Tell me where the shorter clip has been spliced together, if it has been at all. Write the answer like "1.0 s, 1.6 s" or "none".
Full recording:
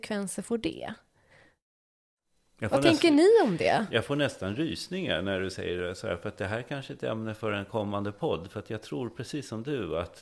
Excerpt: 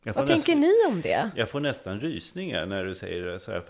none